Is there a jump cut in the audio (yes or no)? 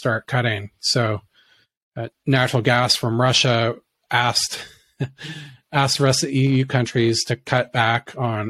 yes